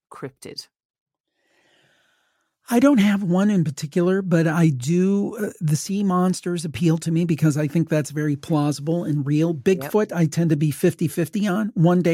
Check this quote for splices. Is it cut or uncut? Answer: uncut